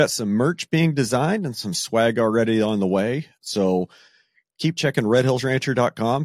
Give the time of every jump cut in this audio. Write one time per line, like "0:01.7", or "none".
0:03.4